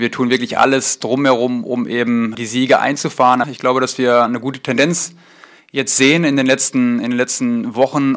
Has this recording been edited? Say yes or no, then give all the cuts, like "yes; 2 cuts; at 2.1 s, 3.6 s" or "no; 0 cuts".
yes; 2 cuts; at 2.3 s, 3.4 s